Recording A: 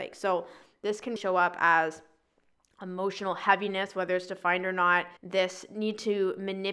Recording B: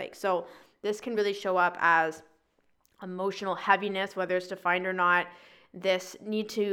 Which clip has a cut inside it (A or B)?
A